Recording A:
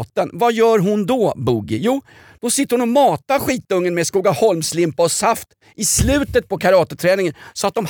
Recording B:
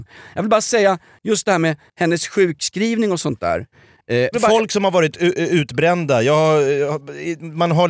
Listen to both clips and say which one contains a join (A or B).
B